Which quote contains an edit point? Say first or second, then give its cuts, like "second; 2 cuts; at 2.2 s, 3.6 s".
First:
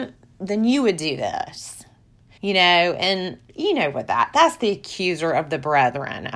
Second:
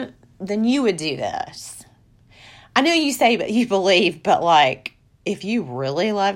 first; 2 cuts; at 2.4 s, 3.5 s